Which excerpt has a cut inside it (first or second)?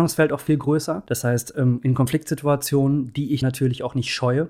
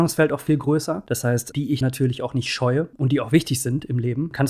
second